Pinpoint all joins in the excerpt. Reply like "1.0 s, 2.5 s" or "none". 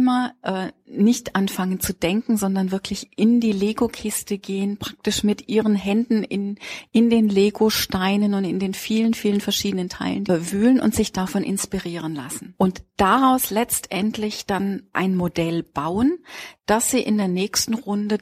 10.3 s